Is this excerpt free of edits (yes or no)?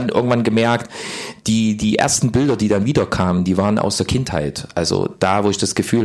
yes